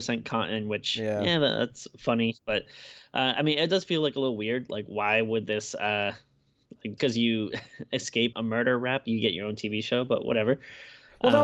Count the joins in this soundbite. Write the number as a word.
two